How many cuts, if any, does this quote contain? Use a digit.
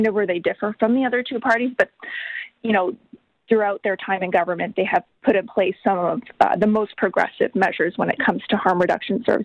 1